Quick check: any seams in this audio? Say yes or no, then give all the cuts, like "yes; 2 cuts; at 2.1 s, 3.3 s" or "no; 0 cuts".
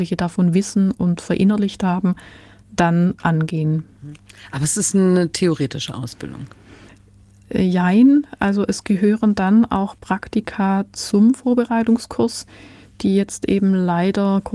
no; 0 cuts